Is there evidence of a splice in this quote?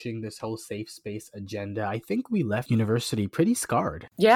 no; 0 cuts

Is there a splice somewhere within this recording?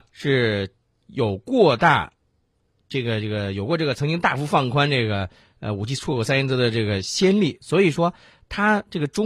no; 0 cuts

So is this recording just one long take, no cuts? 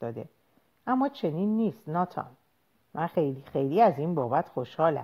yes; 0 cuts

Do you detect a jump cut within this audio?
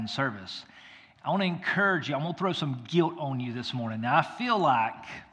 no; 0 cuts

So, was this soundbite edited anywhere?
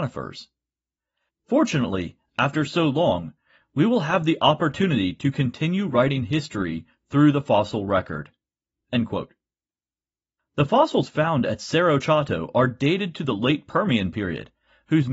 yes; 1 cut; at 1.3 s

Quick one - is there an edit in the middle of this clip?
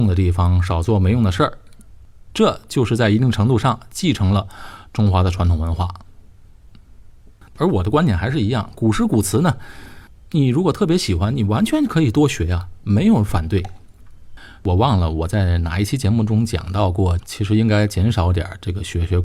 yes; 3 cuts; at 7.5 s, 14.6 s, 17.2 s

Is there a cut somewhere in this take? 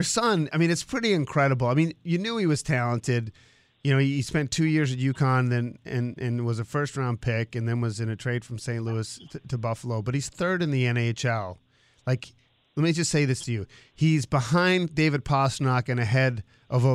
no; 0 cuts

